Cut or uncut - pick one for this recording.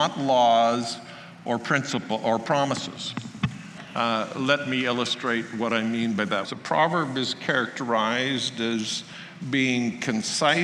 cut